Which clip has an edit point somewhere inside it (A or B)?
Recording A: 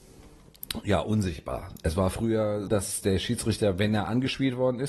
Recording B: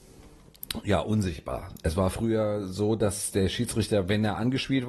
A